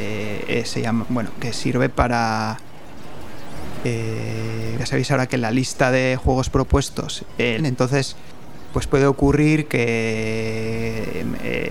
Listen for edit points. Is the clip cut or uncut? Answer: cut